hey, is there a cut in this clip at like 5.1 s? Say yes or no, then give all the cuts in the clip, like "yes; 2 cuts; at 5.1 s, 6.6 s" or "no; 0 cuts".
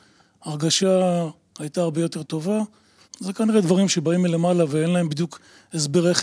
no; 1 cut; at 3.0 s